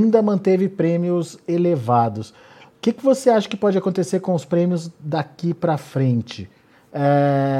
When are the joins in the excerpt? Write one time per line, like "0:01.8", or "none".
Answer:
none